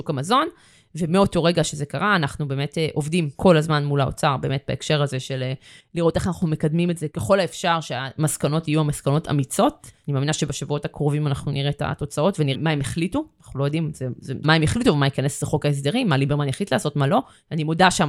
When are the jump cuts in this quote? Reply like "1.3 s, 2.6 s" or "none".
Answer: 12.5 s, 14.4 s